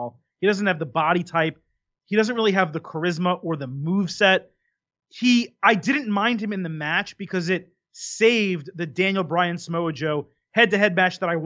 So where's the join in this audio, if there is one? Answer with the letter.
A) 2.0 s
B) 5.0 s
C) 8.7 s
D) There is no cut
D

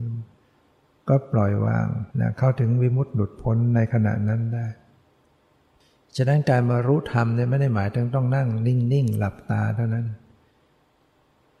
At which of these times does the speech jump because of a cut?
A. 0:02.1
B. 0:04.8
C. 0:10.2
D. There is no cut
A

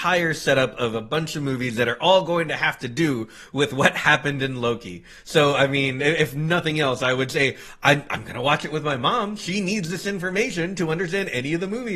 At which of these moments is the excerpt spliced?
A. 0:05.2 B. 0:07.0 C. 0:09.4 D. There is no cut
D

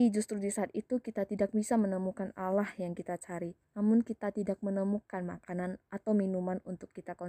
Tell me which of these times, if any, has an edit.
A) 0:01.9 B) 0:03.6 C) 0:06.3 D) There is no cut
B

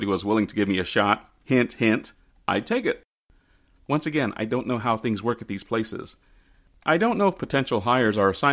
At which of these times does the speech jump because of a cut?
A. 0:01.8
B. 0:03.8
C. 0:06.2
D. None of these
B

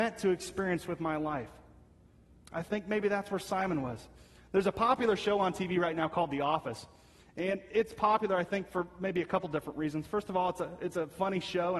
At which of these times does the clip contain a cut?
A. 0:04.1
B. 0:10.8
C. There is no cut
C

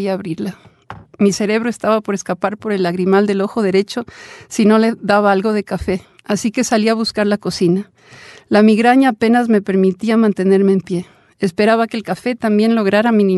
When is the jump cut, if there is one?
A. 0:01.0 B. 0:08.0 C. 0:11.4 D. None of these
A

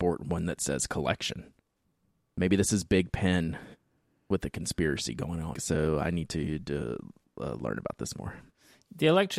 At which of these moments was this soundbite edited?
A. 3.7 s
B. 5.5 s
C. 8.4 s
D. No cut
B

